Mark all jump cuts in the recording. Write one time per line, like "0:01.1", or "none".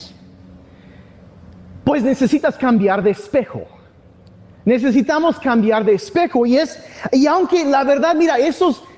none